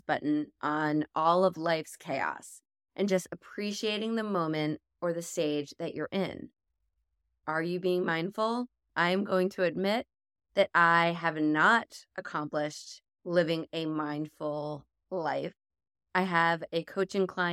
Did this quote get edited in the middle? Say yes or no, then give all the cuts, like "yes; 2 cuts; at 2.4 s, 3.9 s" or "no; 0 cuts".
yes; 2 cuts; at 8.9 s, 16.0 s